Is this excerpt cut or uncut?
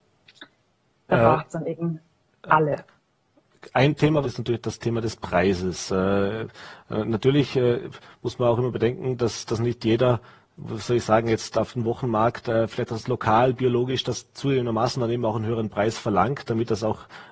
cut